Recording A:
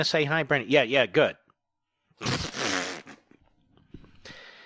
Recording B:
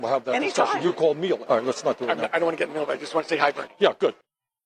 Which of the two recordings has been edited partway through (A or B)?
B